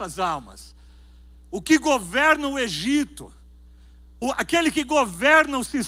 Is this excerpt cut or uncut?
cut